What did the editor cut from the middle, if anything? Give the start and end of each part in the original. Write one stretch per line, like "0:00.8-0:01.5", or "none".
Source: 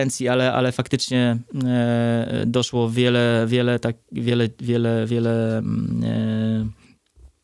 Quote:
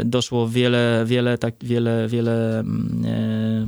0:04.0-0:04.6